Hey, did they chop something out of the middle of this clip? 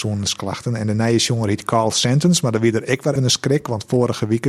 yes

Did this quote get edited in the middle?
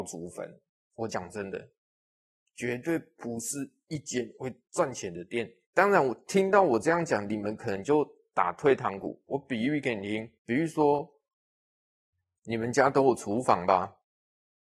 yes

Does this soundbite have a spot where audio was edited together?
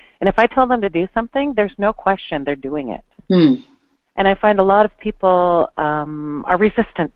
no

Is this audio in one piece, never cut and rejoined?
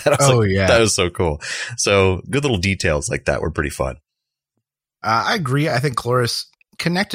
yes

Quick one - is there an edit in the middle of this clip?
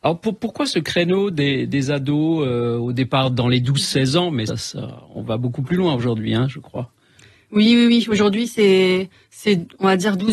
yes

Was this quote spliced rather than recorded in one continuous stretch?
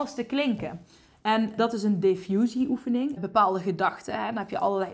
yes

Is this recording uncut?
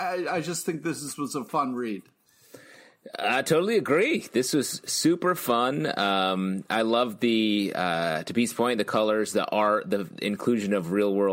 yes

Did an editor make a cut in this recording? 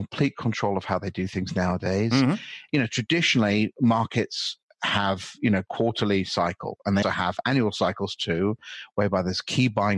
yes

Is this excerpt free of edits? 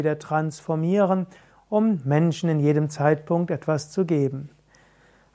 yes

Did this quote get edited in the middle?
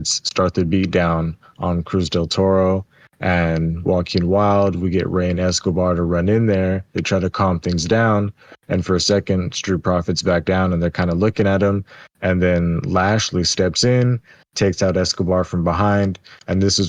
no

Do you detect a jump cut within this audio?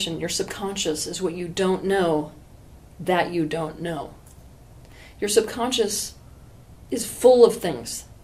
no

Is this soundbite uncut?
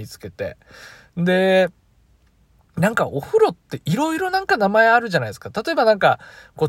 yes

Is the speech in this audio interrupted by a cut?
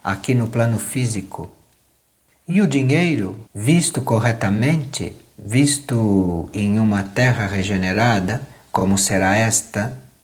yes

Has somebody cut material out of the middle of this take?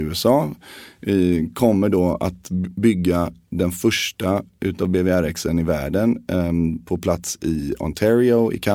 no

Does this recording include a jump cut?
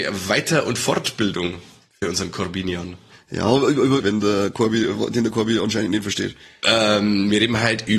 yes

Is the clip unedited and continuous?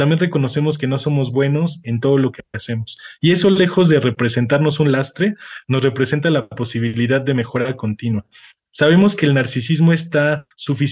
yes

